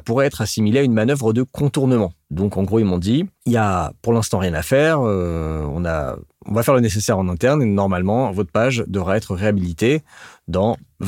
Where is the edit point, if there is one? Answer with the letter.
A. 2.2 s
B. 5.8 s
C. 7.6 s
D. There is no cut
D